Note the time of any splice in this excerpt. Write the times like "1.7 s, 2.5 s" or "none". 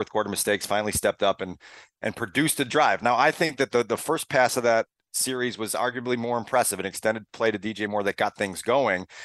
none

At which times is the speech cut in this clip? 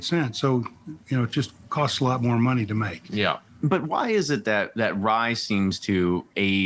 none

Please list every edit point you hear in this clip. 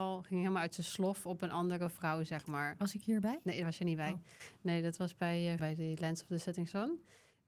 5.6 s

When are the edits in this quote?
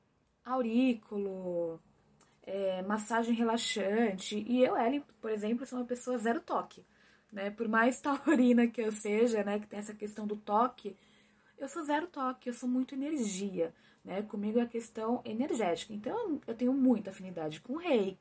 none

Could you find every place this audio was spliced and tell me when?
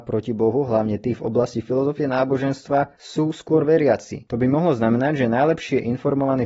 4.3 s

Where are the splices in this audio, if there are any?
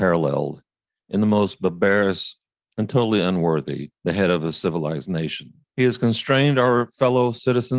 2.6 s, 4.0 s, 5.6 s

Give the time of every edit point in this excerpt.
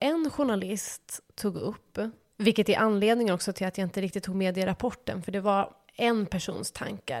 none

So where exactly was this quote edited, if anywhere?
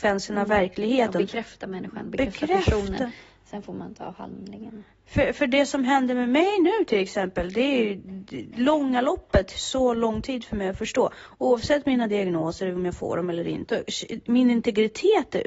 13.7 s

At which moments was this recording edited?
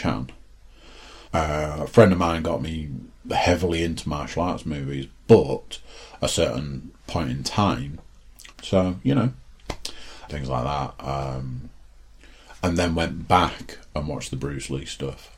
1.3 s, 8.5 s, 10.3 s

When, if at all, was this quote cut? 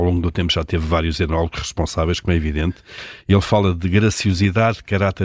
none

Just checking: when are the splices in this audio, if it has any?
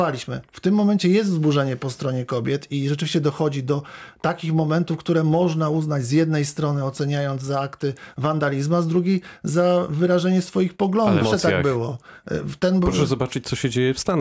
11.2 s

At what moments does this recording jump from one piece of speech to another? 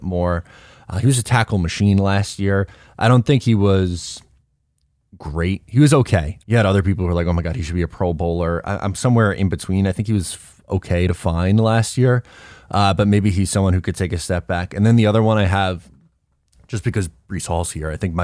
6.4 s

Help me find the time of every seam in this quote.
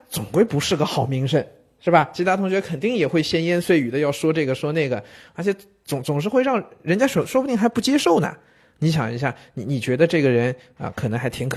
none

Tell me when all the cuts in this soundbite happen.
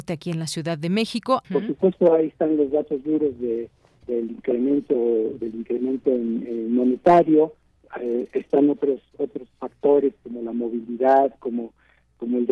1.4 s

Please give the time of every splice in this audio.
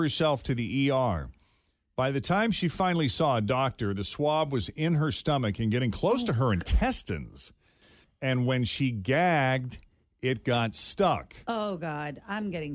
8.0 s

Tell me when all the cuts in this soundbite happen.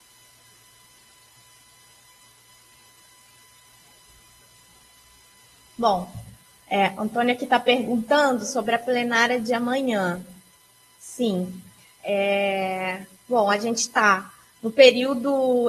none

